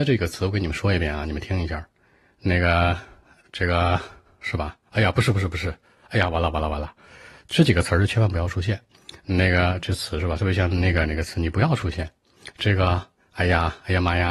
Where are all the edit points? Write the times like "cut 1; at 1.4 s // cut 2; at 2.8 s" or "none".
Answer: none